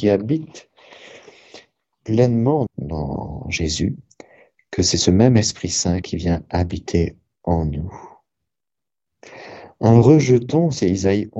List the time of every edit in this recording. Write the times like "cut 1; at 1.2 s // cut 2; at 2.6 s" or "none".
cut 1; at 2.7 s